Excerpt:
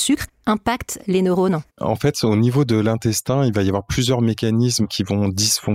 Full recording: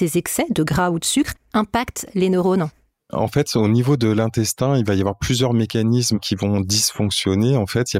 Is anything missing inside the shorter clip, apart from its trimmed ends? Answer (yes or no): yes